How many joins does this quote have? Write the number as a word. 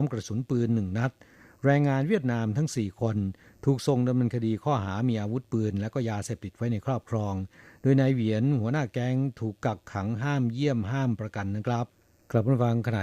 zero